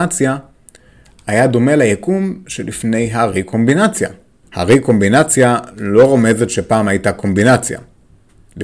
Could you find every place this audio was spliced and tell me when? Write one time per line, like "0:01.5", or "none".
0:04.4